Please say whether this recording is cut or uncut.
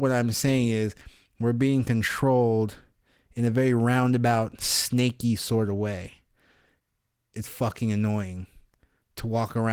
cut